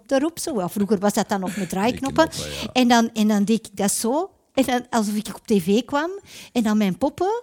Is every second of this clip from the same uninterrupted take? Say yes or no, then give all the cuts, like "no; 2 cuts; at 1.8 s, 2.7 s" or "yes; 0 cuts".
yes; 0 cuts